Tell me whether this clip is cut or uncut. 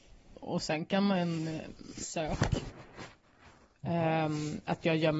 cut